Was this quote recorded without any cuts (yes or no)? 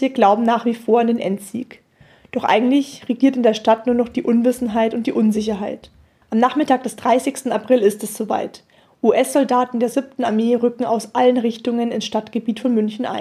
no